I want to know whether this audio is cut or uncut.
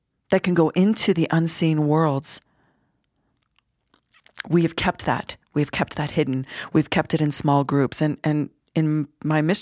uncut